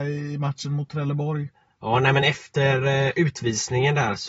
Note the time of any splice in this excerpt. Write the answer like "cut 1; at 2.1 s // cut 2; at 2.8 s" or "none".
none